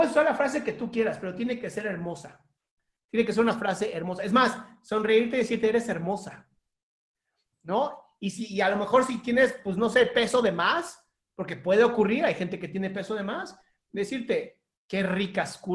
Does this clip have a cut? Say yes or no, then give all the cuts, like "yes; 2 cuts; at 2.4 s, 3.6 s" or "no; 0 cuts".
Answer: no; 0 cuts